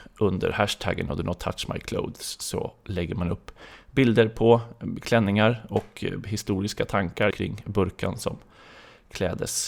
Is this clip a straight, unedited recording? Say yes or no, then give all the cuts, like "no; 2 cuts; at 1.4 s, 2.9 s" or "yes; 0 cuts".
no; 1 cut; at 7.3 s